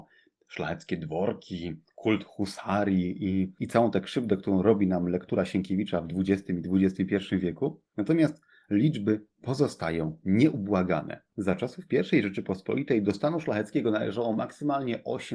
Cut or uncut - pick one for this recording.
uncut